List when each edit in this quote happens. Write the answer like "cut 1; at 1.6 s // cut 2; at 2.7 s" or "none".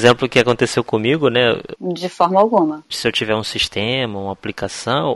cut 1; at 1.8 s